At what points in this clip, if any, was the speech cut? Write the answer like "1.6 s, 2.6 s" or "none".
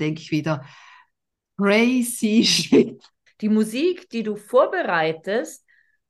3.3 s